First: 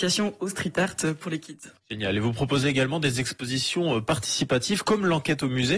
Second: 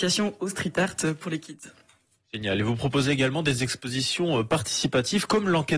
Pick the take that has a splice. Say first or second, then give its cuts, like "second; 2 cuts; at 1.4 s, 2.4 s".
first; 1 cut; at 1.8 s